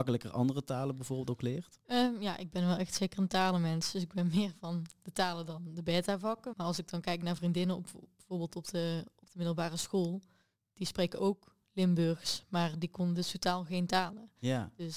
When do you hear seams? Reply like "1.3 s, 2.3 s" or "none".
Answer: 6.5 s